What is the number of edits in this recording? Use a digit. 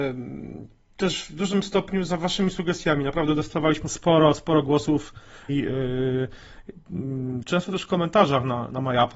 2